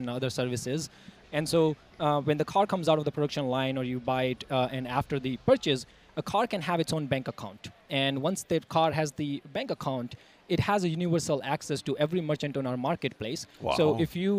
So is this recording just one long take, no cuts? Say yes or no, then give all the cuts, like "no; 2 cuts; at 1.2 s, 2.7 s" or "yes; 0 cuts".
no; 1 cut; at 1.2 s